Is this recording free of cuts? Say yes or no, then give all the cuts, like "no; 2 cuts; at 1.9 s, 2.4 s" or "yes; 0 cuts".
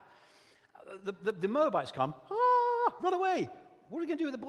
yes; 0 cuts